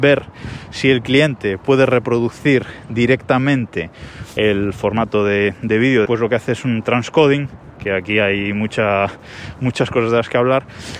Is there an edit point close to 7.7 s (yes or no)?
no